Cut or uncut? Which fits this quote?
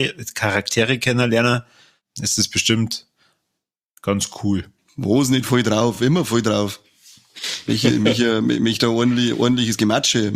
uncut